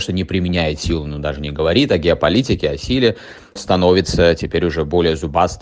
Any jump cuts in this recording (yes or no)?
yes